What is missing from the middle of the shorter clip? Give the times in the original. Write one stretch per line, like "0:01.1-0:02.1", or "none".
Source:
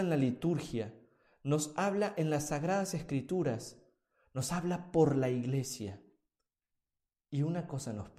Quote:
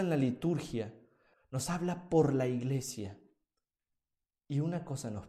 0:01.3-0:04.2